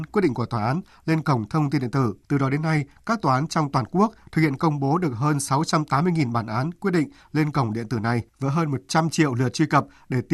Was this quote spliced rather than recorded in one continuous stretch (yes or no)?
yes